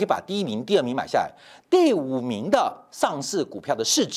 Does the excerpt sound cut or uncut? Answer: uncut